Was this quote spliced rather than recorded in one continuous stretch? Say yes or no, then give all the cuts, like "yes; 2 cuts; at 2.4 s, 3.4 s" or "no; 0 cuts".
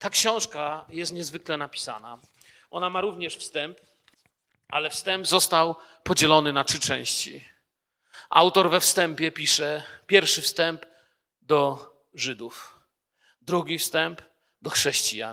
no; 0 cuts